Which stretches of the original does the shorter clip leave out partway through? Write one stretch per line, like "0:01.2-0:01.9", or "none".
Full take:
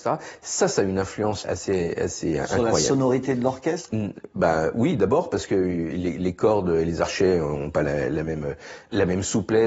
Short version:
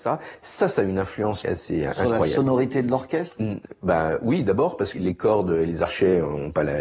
0:01.4-0:01.9
0:05.5-0:06.1